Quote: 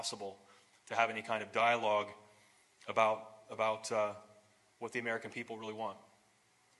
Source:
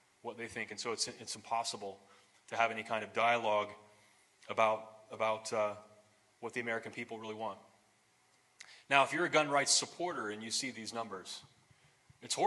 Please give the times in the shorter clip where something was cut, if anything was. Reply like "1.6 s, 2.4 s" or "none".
none